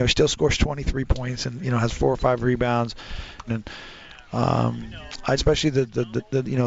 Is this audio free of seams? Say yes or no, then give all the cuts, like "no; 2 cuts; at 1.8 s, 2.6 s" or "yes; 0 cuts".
no; 2 cuts; at 3.5 s, 5.4 s